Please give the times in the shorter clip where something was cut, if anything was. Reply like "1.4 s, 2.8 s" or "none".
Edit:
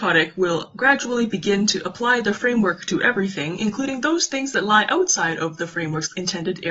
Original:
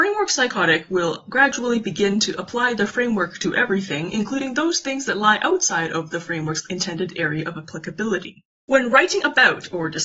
none